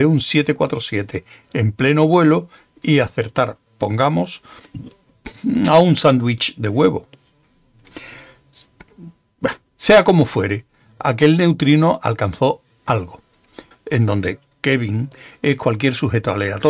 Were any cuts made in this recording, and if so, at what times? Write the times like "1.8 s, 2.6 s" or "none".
13.7 s